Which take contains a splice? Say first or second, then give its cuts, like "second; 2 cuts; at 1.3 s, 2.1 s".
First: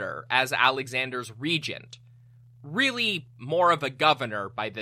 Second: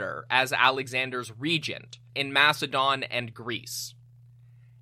second; 1 cut; at 2.1 s